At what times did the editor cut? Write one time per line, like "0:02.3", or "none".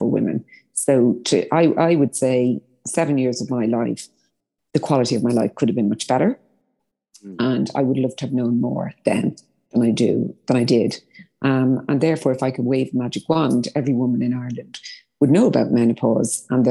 none